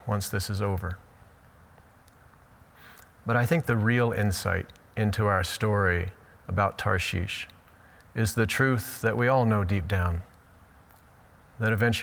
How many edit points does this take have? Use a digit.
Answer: 0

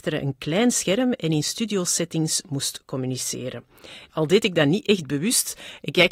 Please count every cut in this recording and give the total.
1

